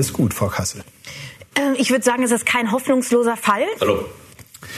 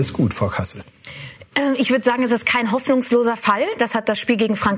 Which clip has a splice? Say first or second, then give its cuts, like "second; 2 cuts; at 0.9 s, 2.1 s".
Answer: first; 1 cut; at 3.8 s